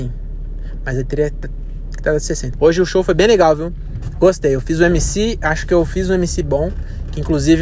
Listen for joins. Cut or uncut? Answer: cut